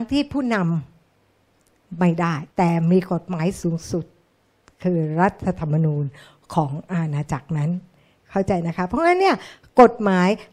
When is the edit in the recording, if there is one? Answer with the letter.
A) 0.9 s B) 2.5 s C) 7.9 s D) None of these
B